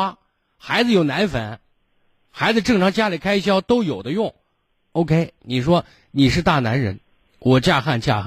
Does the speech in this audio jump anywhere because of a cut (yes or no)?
no